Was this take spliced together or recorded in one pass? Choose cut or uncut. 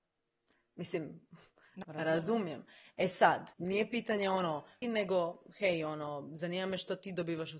cut